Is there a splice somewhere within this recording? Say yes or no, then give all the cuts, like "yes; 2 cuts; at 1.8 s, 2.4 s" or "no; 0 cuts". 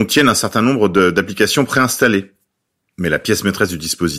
no; 0 cuts